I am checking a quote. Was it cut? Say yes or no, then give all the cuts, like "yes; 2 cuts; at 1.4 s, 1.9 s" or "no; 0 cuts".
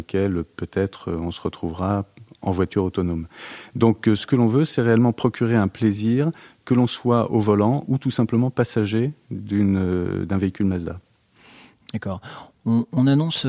no; 0 cuts